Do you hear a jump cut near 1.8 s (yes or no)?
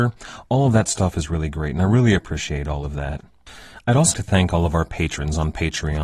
no